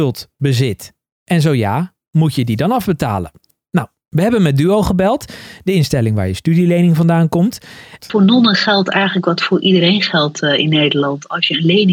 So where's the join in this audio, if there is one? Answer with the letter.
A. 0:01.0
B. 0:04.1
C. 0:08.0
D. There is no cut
C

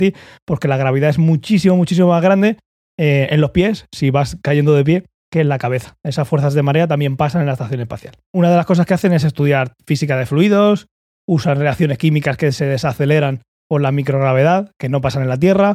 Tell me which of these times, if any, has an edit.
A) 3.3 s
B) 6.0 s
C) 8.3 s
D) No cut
C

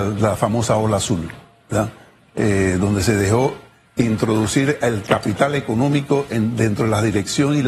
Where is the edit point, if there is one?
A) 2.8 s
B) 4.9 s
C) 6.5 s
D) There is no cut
D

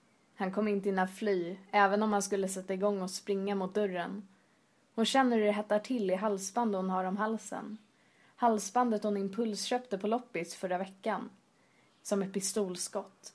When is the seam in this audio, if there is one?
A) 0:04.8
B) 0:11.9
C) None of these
B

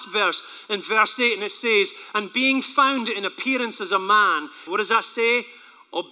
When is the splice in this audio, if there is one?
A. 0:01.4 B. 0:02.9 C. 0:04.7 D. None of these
C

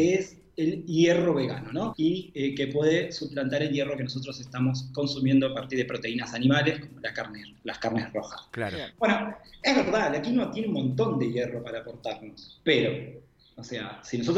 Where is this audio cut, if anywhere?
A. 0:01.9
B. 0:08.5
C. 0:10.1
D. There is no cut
A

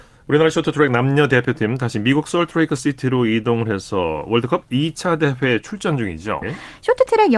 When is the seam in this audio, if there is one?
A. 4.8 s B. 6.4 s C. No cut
B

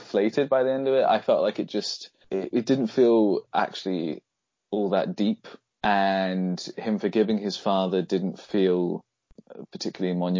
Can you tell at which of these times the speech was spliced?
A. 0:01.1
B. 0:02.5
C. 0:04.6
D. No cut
B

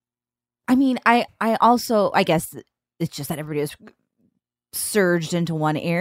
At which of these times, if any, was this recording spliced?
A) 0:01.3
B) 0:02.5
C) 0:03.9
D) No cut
A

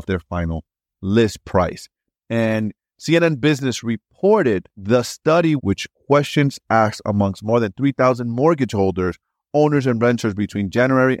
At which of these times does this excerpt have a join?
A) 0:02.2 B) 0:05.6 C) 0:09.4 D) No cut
B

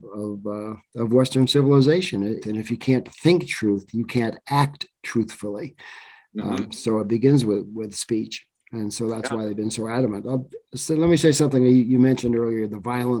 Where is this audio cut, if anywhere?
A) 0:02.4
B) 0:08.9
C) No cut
A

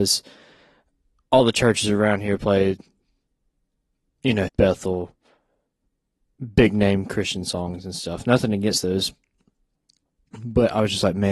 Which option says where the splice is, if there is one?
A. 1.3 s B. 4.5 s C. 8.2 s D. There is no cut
B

